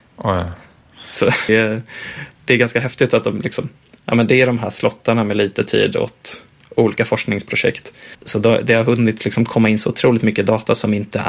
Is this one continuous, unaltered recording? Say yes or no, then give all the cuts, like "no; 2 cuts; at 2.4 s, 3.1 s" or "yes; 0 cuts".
no; 2 cuts; at 1.5 s, 8.1 s